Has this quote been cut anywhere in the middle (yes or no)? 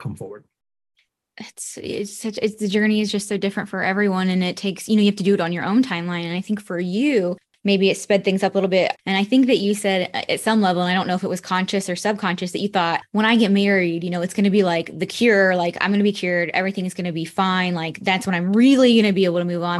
yes